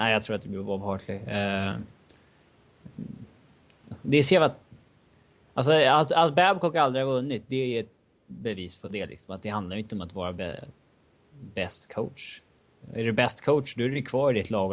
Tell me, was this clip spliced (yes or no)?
no